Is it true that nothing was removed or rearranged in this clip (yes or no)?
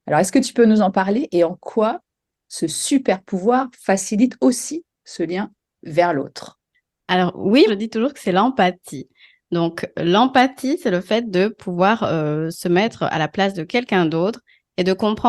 no